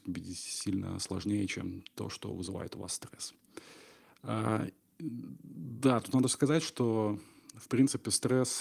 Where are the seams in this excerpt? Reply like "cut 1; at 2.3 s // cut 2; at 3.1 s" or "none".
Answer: none